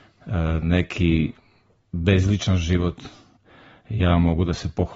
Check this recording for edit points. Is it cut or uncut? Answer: uncut